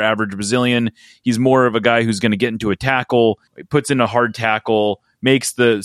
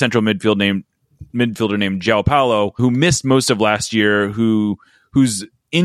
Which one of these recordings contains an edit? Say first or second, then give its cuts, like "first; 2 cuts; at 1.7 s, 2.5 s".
first; 1 cut; at 3.5 s